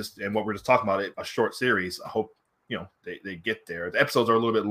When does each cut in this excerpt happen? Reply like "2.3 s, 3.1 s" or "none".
1.1 s